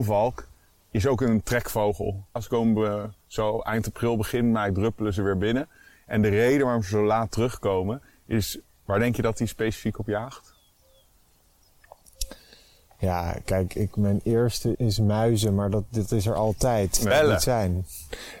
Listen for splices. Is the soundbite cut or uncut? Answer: cut